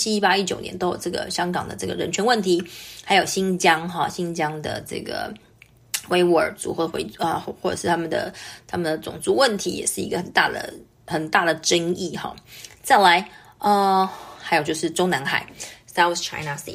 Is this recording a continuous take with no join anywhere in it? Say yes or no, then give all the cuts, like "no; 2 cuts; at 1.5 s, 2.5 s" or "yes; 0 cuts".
yes; 0 cuts